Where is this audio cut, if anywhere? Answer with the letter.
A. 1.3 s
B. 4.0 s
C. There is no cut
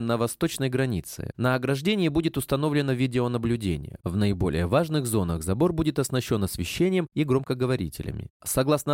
A